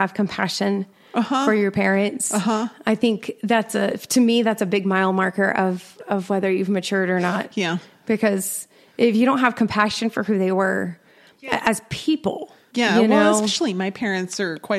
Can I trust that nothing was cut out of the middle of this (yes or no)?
yes